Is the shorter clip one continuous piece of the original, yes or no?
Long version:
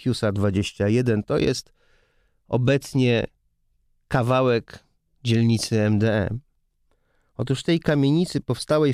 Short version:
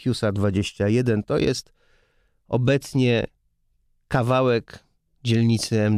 yes